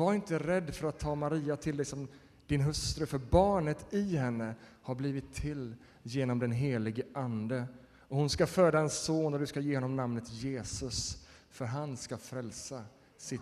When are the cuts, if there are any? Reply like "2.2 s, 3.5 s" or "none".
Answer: none